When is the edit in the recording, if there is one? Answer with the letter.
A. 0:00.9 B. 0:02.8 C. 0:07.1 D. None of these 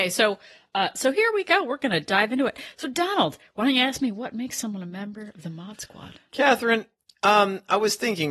D